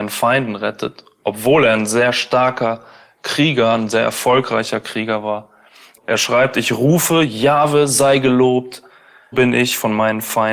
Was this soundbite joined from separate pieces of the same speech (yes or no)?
yes